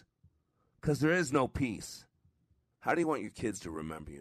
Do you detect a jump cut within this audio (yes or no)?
yes